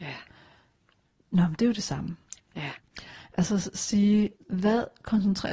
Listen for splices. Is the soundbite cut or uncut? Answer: cut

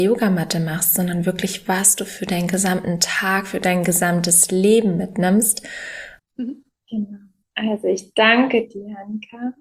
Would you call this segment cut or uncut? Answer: cut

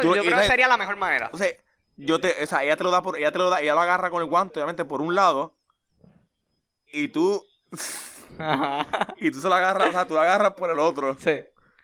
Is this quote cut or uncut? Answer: uncut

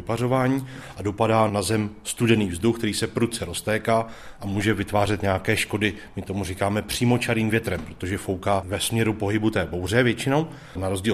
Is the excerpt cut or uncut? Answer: uncut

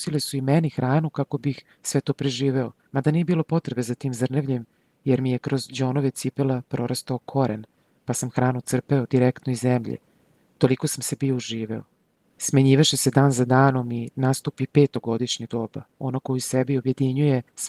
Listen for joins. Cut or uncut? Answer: uncut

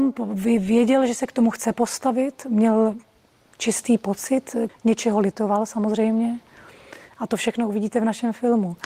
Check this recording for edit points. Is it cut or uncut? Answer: cut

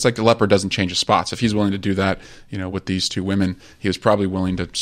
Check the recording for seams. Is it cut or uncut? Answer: uncut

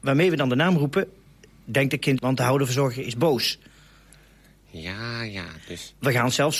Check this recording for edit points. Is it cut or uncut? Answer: cut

